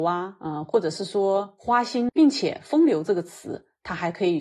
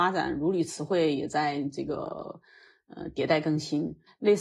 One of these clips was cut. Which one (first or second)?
first